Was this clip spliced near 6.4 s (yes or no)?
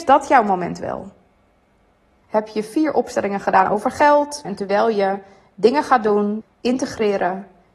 yes